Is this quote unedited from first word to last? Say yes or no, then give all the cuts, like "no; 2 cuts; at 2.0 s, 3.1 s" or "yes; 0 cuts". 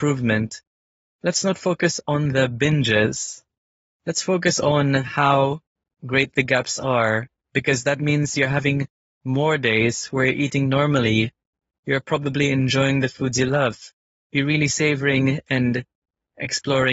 yes; 0 cuts